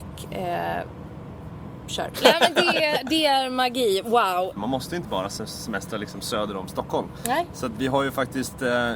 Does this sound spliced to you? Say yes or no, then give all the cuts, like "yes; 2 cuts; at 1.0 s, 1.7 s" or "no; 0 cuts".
yes; 2 cuts; at 2.1 s, 4.6 s